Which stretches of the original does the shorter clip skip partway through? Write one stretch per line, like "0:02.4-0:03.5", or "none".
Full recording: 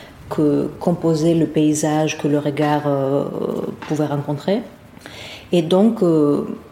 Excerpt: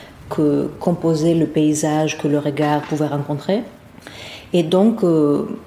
0:02.8-0:03.8